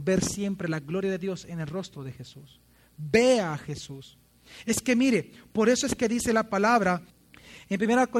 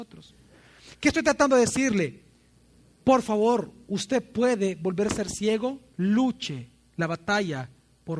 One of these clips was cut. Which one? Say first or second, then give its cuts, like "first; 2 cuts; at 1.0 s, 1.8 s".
second; 1 cut; at 5.9 s